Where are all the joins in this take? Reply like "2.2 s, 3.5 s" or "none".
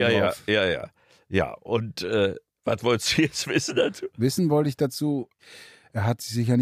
none